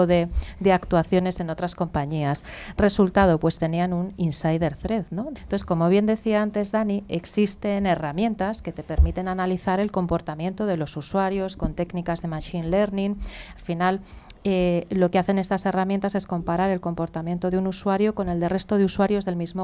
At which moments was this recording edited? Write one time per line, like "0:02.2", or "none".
0:05.4